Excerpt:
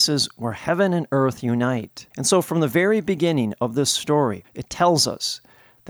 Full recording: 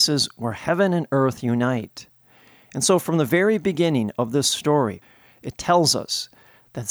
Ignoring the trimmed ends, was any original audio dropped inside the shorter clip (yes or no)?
yes